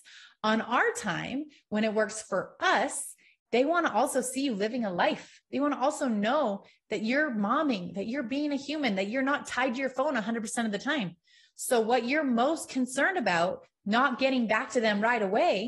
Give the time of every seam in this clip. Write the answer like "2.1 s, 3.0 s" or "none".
3.4 s